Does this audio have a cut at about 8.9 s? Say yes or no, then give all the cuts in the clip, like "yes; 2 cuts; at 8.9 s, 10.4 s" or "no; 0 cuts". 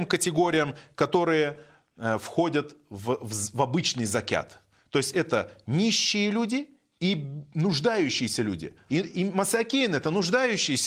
yes; 1 cut; at 8.9 s